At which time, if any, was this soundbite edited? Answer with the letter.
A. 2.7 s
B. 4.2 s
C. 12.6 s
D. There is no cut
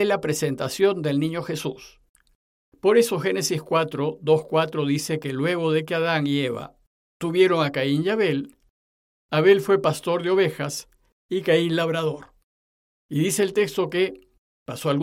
A